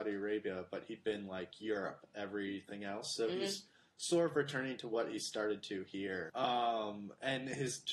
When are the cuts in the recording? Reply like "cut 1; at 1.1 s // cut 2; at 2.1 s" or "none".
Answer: cut 1; at 6.3 s